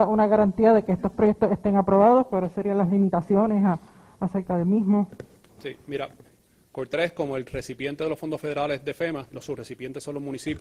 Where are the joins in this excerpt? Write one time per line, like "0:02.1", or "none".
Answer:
0:06.2
0:09.3

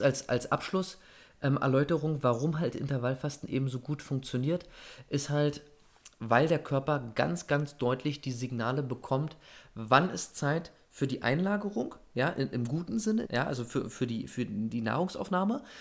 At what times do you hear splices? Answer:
0:13.2

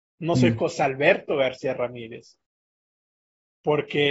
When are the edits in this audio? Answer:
none

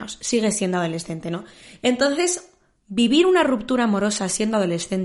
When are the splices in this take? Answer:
none

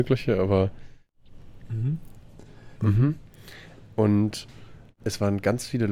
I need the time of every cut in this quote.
0:02.8

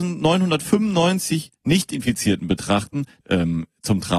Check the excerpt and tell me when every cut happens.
0:03.2

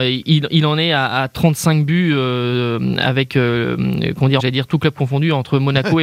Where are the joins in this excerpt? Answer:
0:04.4

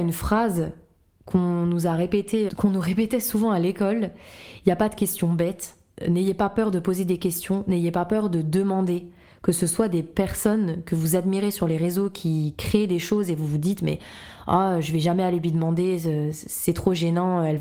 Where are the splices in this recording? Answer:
0:02.5

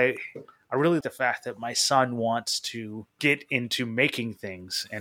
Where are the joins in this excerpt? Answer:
0:01.0
0:03.1

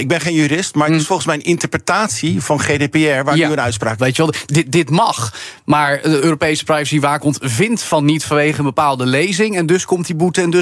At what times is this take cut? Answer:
0:04.0

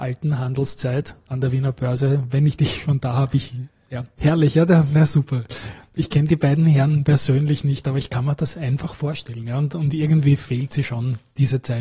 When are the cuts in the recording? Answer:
0:04.2

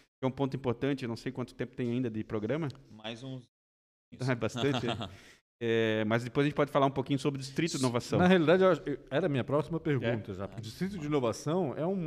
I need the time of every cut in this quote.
0:10.6

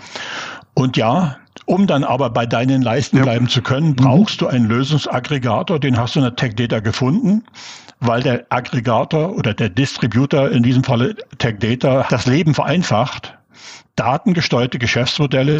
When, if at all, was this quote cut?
0:12.1

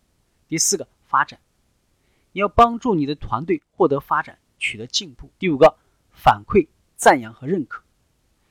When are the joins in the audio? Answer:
0:05.4

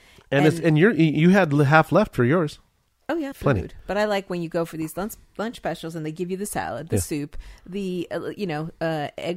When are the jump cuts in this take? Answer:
0:03.3

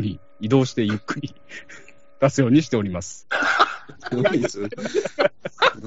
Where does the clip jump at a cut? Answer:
0:04.1

